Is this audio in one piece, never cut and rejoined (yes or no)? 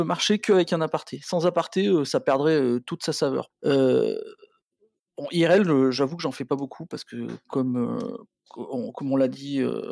no